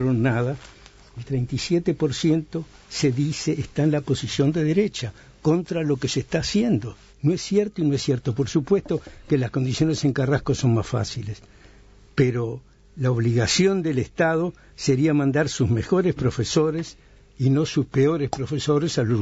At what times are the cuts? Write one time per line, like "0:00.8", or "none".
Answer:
0:07.1